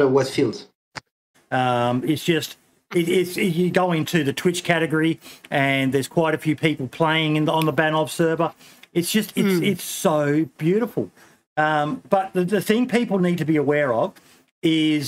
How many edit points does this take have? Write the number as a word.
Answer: one